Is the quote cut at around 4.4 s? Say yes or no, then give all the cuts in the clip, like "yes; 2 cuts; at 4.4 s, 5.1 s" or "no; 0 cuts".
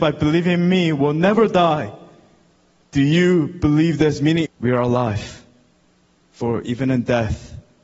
yes; 2 cuts; at 4.4 s, 6.2 s